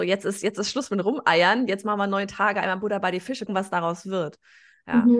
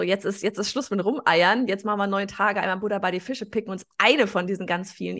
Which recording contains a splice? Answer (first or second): first